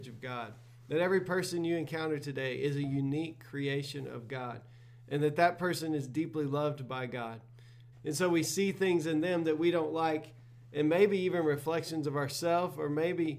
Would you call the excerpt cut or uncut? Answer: cut